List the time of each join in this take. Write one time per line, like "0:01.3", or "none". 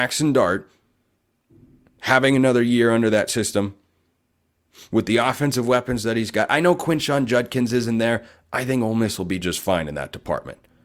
none